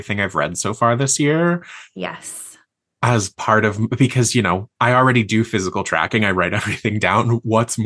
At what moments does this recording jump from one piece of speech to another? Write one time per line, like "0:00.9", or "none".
none